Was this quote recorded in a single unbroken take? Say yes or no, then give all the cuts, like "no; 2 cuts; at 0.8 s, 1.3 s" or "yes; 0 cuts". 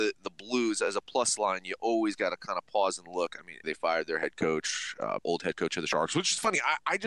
no; 2 cuts; at 3.6 s, 5.2 s